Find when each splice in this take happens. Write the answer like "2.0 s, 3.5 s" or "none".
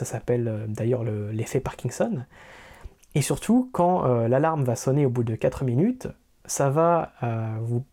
none